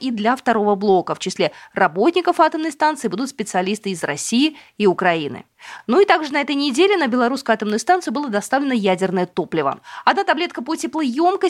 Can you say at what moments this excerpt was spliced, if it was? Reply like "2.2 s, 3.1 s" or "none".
none